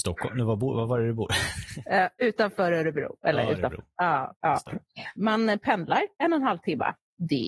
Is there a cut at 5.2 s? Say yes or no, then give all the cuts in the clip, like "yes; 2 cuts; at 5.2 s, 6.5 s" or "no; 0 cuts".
yes; 1 cut; at 5.2 s